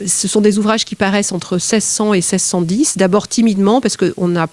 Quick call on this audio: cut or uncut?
uncut